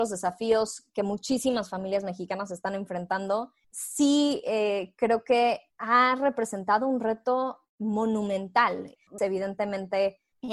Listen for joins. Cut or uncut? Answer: cut